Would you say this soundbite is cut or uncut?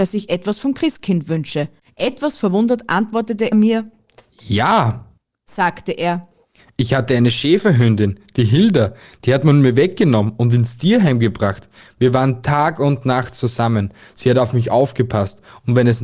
cut